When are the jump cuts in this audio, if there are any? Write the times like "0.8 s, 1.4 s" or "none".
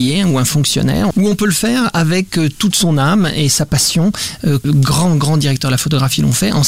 1.1 s, 4.6 s